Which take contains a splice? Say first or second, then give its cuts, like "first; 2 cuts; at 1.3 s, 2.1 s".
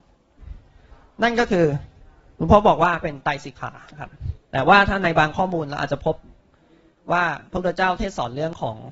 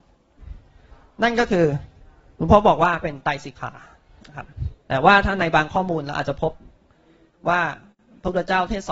first; 2 cuts; at 3.9 s, 7.5 s